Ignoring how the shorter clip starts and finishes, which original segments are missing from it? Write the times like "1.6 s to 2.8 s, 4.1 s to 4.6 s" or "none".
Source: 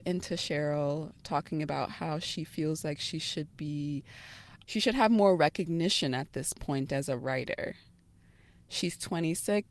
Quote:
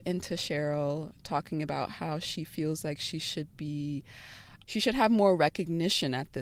none